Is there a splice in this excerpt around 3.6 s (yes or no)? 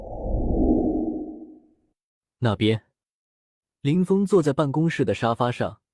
no